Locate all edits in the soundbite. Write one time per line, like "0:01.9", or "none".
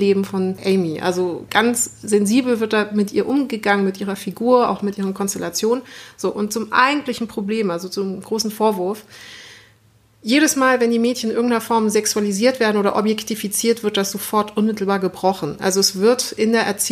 none